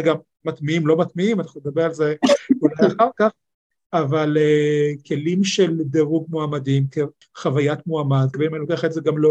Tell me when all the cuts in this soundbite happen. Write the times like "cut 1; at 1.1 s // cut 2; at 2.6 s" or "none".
cut 1; at 7.2 s // cut 2; at 8.3 s